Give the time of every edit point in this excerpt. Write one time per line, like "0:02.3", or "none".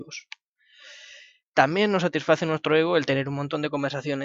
0:01.4